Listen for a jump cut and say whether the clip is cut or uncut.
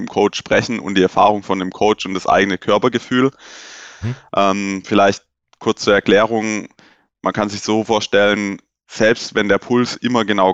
cut